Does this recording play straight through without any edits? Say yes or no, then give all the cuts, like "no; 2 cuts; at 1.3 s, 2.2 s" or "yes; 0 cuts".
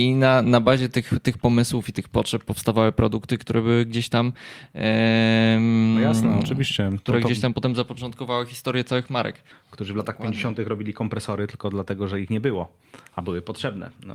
no; 1 cut; at 9.5 s